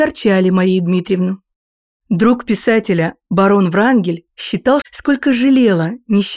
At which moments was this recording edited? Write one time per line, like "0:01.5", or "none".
0:04.8

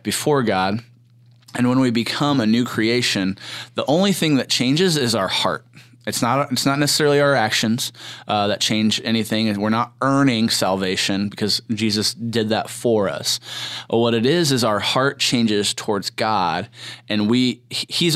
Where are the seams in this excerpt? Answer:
none

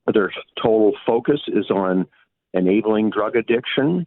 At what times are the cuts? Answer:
none

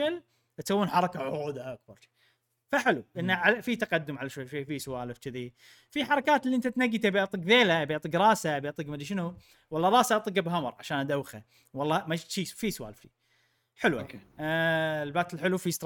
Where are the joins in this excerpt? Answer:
none

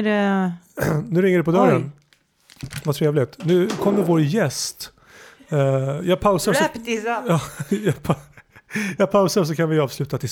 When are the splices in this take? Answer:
none

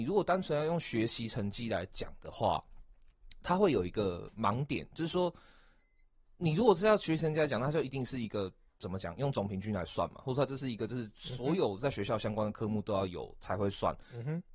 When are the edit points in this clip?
none

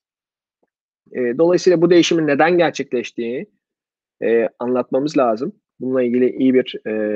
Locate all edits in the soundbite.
0:04.6
0:05.7

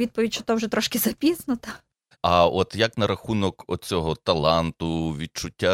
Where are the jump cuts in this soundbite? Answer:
0:02.1

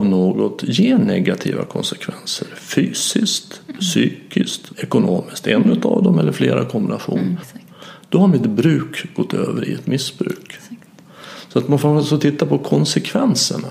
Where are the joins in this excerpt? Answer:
0:04.7
0:07.4

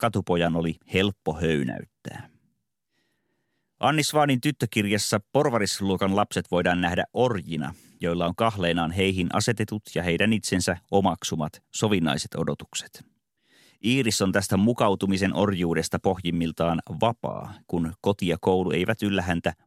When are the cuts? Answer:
none

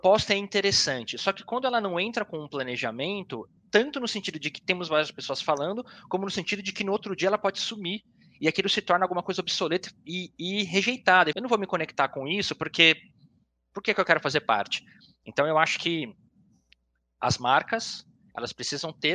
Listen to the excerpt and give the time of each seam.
0:03.6
0:11.3

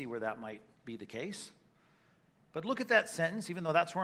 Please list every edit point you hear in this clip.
none

